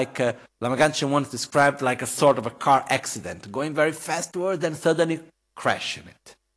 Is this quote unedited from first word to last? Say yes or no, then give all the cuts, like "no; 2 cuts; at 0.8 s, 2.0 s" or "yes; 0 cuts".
no; 1 cut; at 5.4 s